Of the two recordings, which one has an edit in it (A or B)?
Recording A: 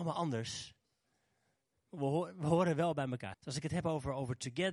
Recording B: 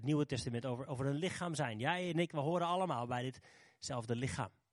A